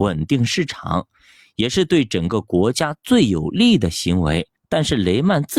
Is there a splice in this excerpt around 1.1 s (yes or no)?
no